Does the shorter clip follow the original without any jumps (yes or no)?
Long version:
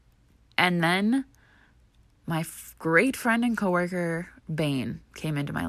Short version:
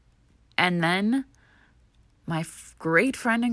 yes